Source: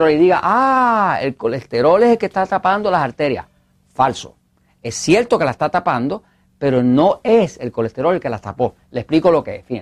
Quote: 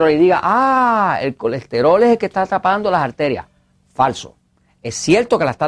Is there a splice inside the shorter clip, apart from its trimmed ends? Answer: no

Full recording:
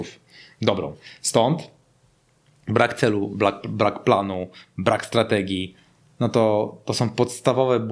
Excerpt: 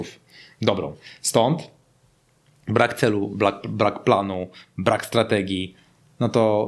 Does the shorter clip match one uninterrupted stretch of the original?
yes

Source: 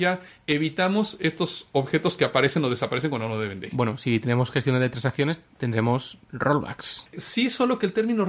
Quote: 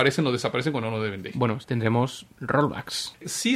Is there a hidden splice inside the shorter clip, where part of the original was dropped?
yes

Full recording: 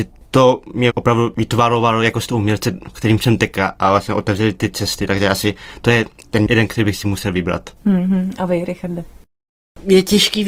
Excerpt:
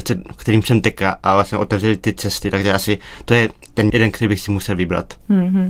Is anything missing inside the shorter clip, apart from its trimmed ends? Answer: no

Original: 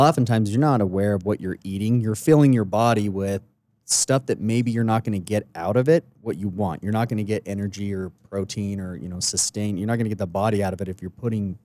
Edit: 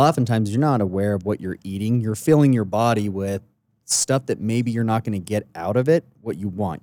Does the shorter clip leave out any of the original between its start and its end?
no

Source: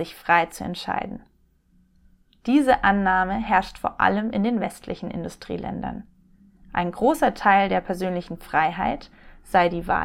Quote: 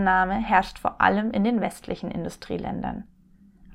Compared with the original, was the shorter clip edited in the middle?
no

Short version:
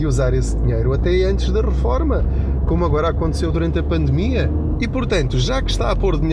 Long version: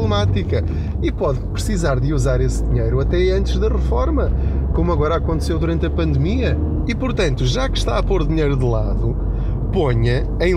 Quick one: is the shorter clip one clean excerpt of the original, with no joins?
yes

